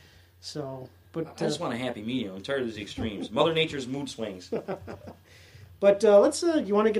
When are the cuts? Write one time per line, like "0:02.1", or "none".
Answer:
none